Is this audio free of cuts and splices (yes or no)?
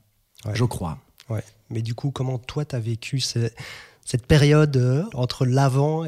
no